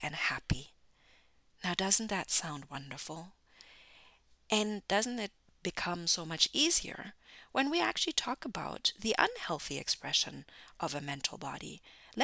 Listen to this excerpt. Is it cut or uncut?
uncut